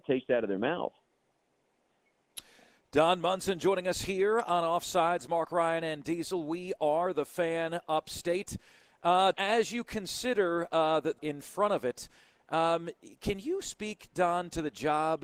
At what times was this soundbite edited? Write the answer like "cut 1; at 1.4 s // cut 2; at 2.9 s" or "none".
cut 1; at 9.3 s // cut 2; at 11.2 s